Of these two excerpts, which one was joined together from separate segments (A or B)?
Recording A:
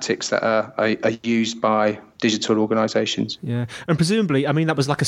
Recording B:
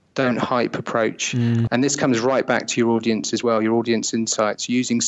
B